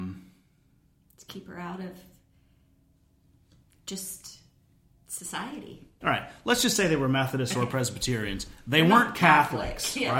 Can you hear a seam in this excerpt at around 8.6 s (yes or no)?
no